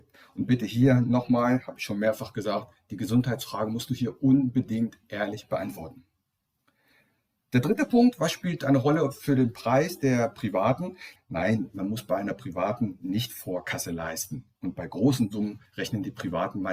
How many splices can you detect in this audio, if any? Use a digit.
3